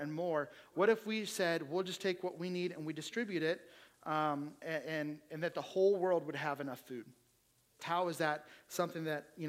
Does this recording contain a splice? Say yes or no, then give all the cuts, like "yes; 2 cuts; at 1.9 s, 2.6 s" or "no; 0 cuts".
yes; 2 cuts; at 4.6 s, 7.8 s